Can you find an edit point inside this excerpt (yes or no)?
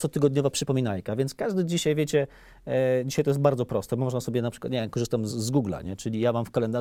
yes